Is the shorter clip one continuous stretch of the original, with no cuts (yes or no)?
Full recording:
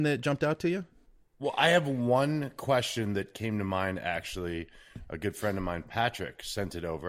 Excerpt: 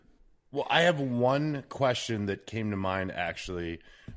yes